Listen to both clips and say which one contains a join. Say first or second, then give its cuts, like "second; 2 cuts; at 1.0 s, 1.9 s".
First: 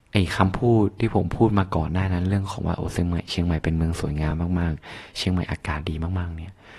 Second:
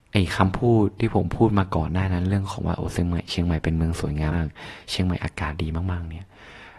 second; 1 cut; at 4.3 s